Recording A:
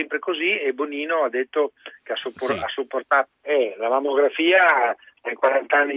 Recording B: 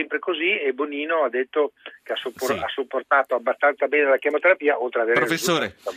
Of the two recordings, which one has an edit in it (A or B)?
A